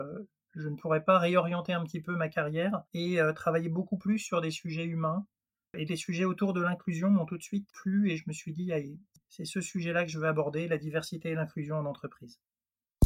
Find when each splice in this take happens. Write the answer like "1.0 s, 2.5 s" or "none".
2.9 s, 5.9 s